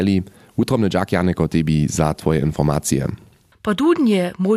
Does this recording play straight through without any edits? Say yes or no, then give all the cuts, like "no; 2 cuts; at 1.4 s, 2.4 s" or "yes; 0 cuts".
no; 1 cut; at 3.5 s